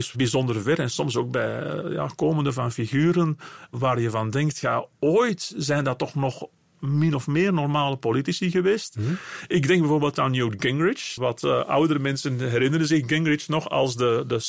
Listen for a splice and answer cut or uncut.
cut